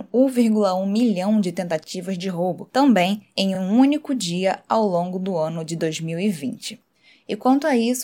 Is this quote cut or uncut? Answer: uncut